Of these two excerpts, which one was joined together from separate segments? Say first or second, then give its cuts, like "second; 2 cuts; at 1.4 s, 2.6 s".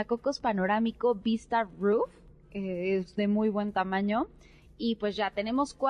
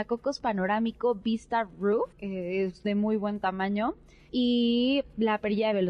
second; 2 cuts; at 2.1 s, 4.3 s